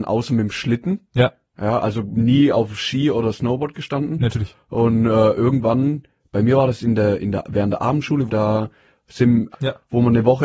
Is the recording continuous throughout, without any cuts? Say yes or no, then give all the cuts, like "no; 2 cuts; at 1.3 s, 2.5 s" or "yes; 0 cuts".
no; 2 cuts; at 8.3 s, 9.5 s